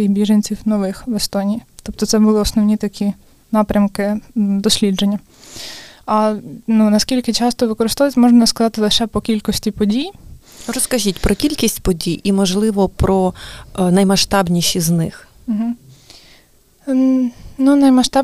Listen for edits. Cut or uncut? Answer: uncut